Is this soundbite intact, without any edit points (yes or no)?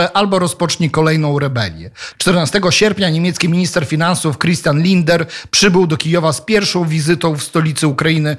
no